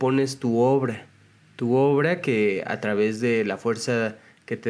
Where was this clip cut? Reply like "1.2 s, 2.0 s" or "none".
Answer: none